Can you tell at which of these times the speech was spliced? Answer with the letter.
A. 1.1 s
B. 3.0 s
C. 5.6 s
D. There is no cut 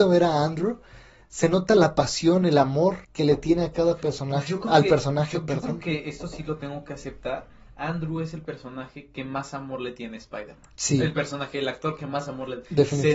B